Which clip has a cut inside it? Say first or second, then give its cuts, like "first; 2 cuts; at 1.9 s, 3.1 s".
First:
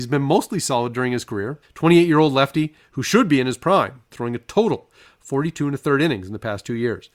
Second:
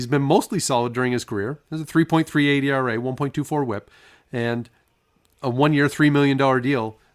first; 2 cuts; at 1.6 s, 4.1 s